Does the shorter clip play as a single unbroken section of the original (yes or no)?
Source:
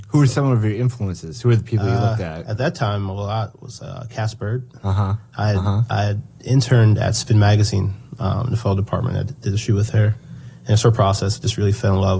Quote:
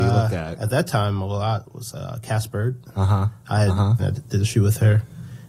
no